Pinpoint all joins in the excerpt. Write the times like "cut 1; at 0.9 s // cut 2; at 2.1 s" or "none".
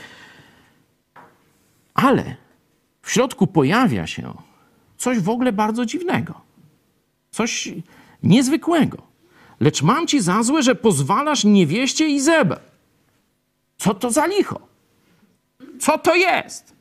none